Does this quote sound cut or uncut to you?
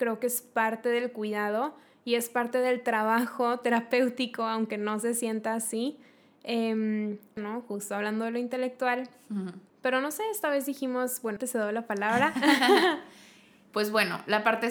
cut